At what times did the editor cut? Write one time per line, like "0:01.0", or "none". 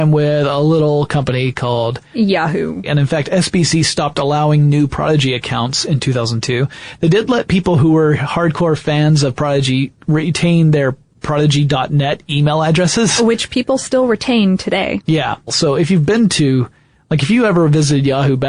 0:02.8
0:15.5